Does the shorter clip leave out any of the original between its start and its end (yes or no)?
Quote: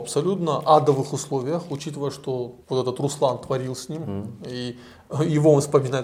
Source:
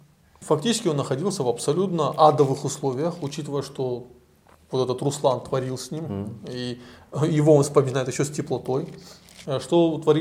yes